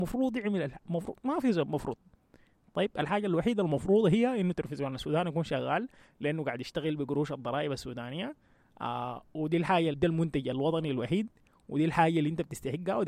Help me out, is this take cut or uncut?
cut